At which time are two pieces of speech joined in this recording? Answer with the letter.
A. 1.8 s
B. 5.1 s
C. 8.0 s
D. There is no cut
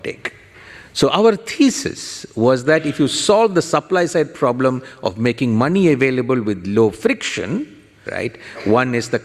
C